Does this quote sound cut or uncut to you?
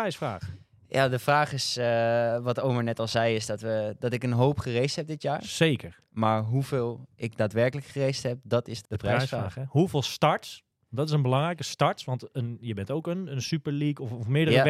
cut